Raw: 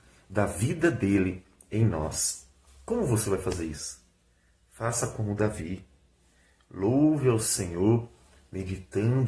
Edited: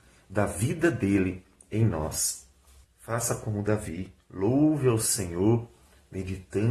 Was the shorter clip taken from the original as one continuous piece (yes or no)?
no